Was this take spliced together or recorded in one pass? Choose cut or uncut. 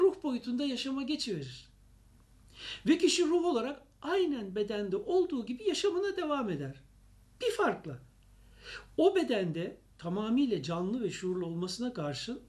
uncut